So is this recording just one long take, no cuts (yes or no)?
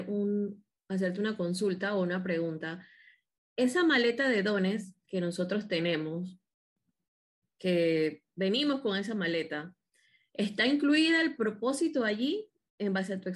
yes